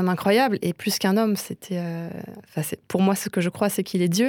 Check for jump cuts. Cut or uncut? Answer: uncut